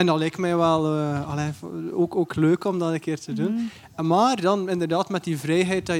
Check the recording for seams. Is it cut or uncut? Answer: uncut